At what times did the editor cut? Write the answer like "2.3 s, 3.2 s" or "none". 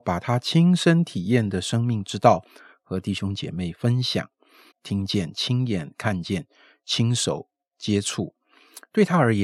4.7 s